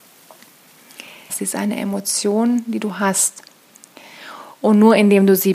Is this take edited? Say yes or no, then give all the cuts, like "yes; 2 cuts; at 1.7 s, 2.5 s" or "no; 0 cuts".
yes; 1 cut; at 1.3 s